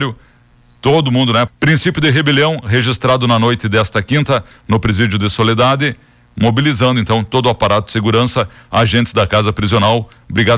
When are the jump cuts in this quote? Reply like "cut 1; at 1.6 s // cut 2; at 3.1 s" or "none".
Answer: cut 1; at 1.5 s